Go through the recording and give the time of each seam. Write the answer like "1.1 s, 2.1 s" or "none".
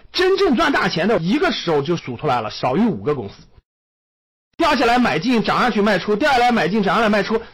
4.4 s